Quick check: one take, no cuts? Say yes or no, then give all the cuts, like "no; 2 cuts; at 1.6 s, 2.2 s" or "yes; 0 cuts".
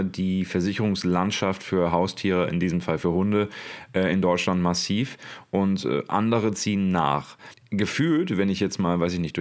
yes; 0 cuts